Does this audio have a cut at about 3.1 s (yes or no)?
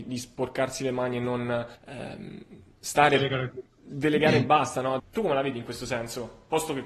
no